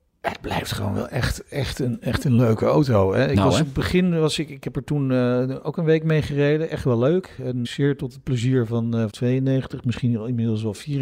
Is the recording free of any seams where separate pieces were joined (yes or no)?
no